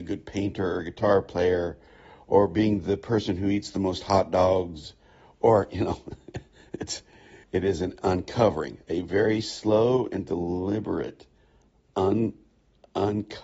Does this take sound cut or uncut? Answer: cut